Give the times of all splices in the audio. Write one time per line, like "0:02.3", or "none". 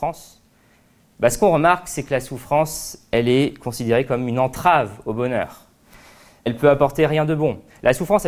0:06.5